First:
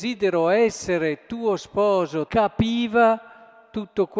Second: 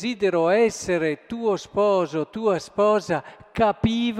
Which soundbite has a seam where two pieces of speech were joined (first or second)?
first